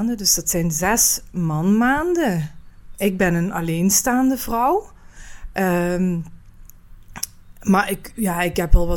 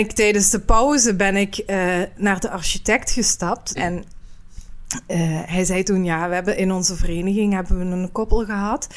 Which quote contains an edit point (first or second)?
second